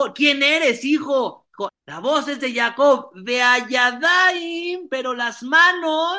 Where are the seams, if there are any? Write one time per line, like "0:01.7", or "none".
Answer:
0:01.7